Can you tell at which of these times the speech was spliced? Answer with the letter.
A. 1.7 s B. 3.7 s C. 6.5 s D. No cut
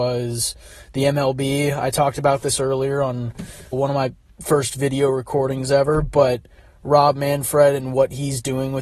B